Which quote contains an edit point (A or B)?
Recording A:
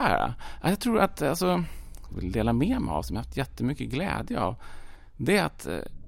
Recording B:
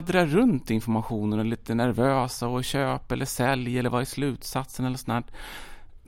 A